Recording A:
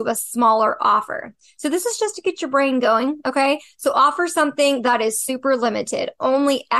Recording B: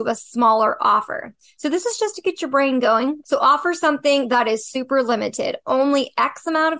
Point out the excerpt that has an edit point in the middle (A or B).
B